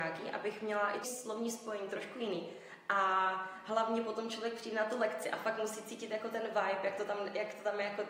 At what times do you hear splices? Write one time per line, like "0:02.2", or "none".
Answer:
0:01.0